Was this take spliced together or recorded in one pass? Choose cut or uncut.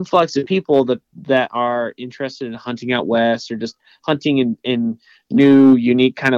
uncut